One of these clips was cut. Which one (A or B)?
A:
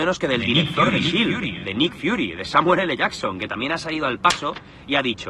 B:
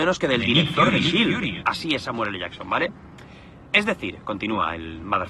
B